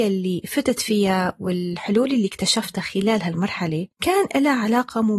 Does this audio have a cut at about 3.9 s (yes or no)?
yes